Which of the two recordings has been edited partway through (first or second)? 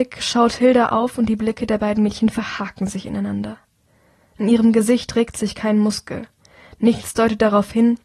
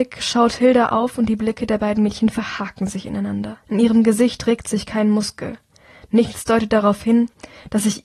second